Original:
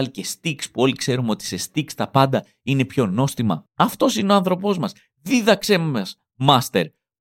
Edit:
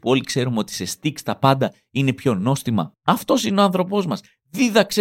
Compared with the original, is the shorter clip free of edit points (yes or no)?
yes